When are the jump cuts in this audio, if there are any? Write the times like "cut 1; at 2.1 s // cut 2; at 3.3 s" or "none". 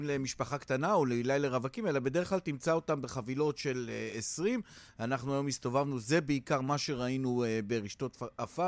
none